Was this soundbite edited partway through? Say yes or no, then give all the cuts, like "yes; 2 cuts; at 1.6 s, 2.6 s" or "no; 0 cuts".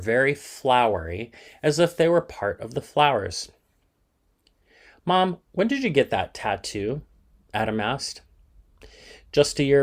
no; 0 cuts